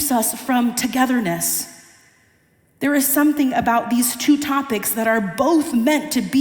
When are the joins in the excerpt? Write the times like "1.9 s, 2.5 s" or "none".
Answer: none